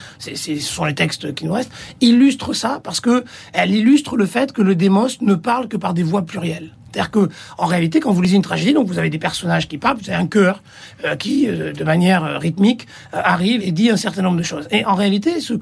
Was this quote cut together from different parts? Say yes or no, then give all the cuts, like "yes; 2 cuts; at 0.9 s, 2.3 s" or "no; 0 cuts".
yes; 1 cut; at 13.6 s